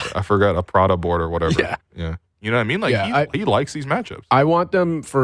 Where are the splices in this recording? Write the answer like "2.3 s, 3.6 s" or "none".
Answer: 2.3 s